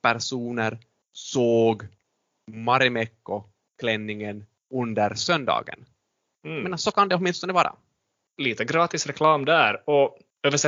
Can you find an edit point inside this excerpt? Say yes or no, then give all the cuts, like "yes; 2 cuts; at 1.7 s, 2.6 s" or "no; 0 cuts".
no; 0 cuts